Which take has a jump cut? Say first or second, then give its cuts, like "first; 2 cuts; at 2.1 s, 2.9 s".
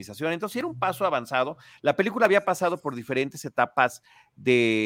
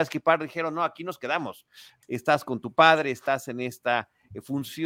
second; 1 cut; at 2.0 s